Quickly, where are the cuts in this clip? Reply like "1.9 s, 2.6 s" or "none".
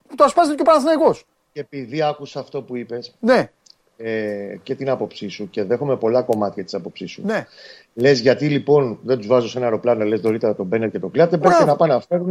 none

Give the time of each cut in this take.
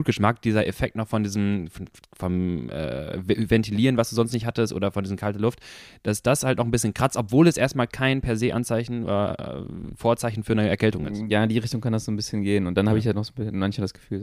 none

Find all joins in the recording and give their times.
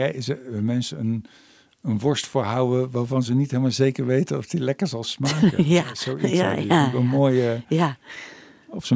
none

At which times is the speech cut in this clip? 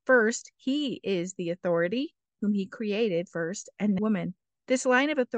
2.4 s, 4.0 s

